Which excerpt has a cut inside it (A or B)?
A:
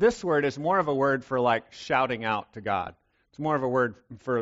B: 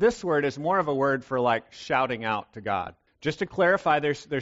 B